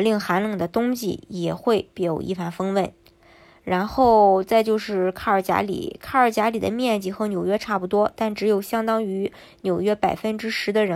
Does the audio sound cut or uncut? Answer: uncut